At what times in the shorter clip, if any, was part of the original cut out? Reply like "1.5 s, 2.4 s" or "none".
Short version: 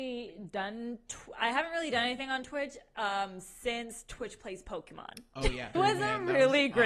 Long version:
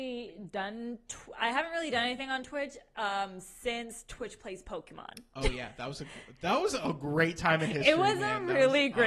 5.7 s